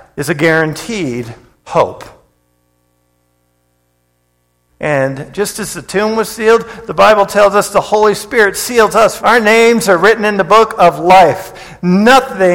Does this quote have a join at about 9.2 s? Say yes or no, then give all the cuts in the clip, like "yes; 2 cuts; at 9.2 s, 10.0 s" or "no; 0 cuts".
yes; 2 cuts; at 4.7 s, 9.2 s